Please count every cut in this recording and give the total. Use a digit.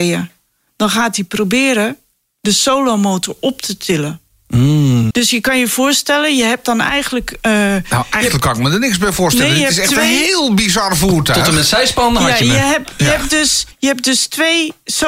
1